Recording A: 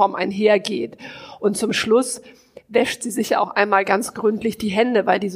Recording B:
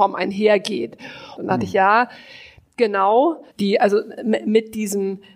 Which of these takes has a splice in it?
B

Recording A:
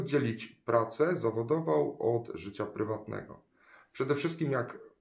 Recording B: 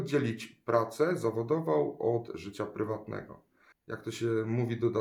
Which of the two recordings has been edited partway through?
B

